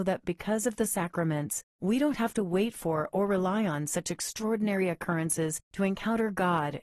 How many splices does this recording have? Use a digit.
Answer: 1